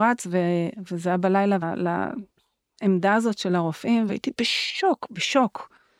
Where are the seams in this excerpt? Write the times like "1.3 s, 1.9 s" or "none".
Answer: 1.6 s, 4.1 s